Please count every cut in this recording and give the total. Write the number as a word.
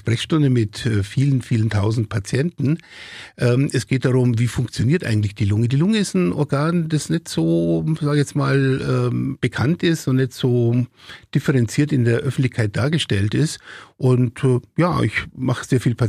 zero